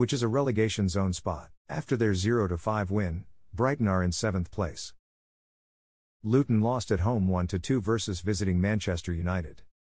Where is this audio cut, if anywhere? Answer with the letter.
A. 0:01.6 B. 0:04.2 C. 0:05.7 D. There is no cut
A